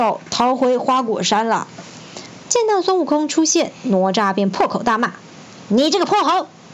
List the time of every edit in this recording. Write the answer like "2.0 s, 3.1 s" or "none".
2.4 s